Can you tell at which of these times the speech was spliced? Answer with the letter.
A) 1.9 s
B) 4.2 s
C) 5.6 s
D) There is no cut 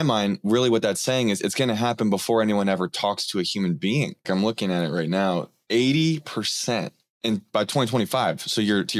B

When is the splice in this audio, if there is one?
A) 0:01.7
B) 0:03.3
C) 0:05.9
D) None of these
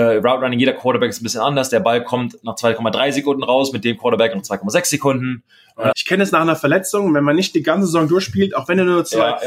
C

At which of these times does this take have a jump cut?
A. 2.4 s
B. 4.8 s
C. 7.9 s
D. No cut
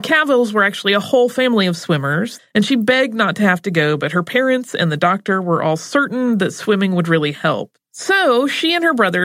A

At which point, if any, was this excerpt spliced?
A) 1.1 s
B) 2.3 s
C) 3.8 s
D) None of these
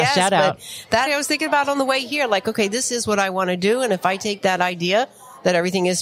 A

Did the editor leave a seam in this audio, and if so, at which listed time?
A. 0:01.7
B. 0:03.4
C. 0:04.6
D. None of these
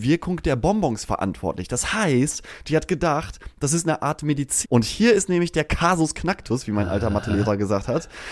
C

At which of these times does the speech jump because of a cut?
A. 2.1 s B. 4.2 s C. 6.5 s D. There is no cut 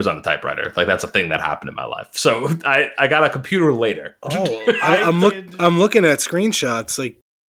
D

